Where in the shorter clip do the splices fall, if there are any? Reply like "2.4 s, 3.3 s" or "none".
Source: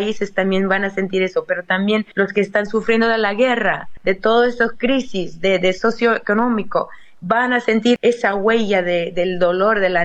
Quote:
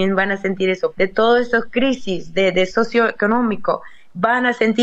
0.9 s